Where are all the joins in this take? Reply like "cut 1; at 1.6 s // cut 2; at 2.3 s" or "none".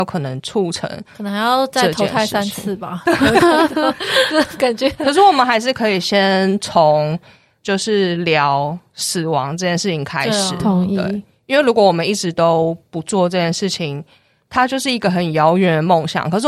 none